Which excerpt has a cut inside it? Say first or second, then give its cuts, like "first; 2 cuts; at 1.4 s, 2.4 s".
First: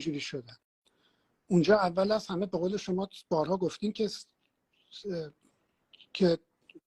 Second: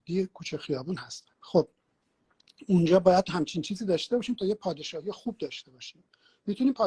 second; 1 cut; at 1.3 s